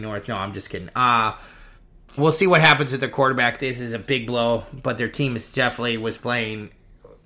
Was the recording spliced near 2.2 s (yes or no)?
yes